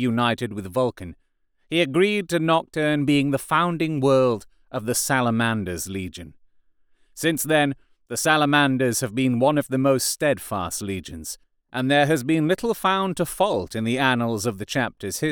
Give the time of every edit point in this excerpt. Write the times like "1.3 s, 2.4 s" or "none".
none